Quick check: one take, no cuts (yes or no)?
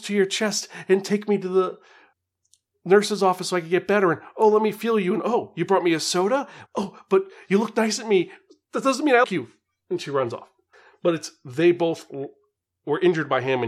no